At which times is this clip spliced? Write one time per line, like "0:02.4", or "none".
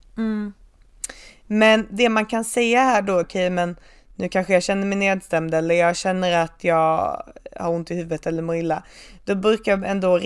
0:03.2